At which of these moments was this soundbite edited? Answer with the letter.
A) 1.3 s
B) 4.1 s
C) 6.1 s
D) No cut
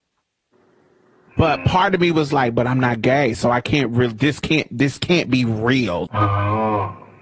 C